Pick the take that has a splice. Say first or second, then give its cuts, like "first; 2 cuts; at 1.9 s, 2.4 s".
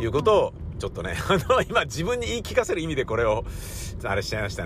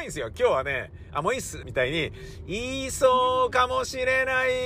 second; 1 cut; at 1.6 s